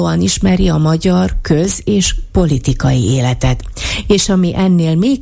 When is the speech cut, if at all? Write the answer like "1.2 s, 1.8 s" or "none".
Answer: none